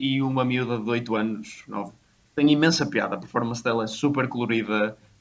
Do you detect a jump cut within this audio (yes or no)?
no